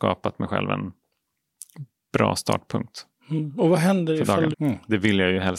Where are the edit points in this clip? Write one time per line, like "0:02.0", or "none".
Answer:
0:04.5